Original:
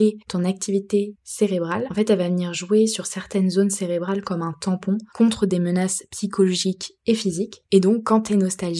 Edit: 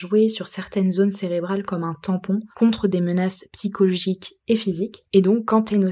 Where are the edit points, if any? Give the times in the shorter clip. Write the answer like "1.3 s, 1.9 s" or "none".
none